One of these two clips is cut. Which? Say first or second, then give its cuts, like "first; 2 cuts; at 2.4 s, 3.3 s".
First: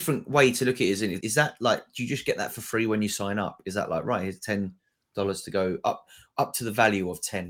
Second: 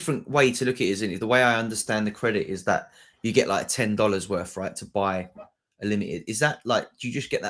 first; 1 cut; at 1.2 s